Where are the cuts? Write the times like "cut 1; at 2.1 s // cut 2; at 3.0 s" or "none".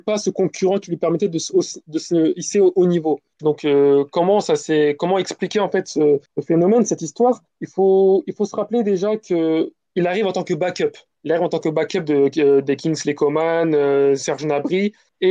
cut 1; at 3.4 s